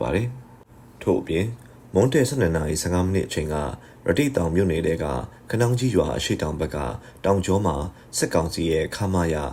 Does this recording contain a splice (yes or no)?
no